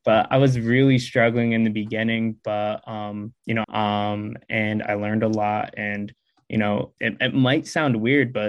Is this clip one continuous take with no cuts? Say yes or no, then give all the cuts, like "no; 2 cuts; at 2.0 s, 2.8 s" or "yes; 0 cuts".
no; 2 cuts; at 3.6 s, 7.0 s